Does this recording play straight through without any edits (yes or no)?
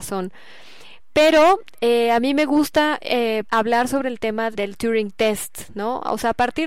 no